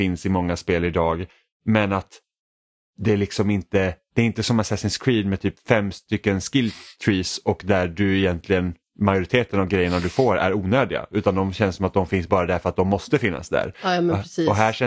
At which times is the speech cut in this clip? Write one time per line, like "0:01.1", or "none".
none